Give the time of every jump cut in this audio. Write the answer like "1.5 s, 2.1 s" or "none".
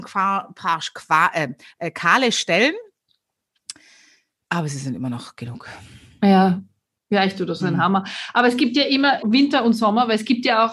7.6 s, 9.2 s